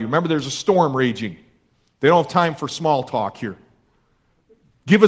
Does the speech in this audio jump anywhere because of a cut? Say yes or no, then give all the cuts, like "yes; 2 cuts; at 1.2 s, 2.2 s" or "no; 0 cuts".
no; 0 cuts